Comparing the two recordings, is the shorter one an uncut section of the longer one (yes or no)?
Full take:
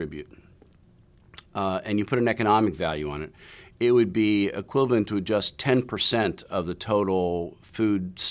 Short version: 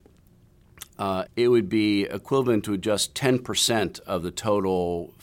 no